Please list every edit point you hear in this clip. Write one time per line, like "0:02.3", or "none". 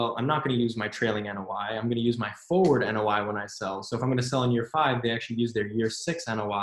none